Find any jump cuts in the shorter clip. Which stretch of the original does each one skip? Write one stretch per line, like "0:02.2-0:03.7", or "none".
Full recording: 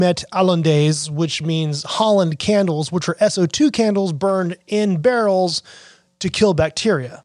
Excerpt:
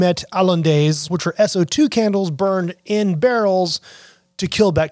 0:01.1-0:02.9